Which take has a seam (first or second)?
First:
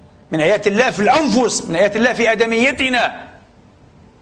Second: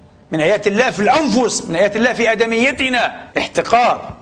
second